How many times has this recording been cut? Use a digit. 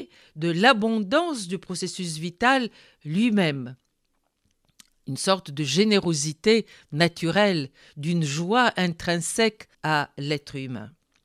1